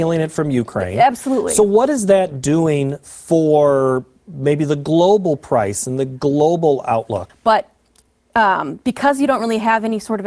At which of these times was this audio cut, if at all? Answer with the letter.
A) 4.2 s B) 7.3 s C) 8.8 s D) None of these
B